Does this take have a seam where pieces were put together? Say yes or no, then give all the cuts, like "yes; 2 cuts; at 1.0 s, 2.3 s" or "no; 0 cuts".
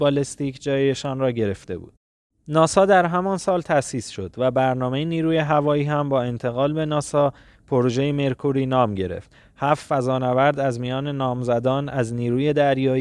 no; 0 cuts